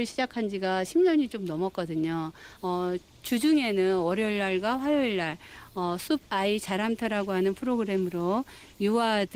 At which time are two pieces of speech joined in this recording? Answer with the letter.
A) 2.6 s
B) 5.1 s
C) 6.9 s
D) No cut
A